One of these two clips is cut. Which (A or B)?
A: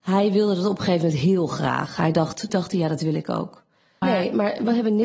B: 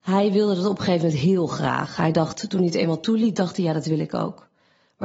A